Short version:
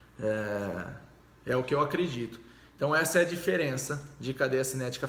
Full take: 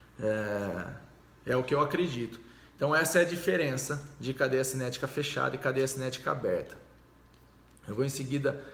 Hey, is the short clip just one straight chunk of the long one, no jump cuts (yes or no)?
yes